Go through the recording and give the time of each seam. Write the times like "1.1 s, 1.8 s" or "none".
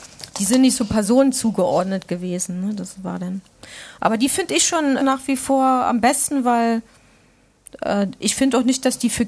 5.0 s